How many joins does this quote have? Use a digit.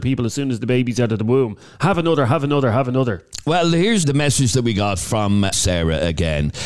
2